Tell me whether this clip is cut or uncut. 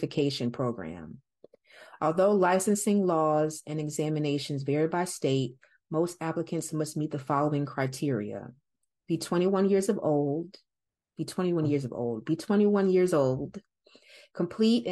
uncut